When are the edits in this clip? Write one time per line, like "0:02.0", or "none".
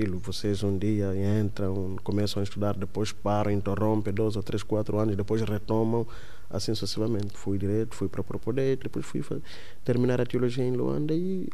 0:07.3
0:08.8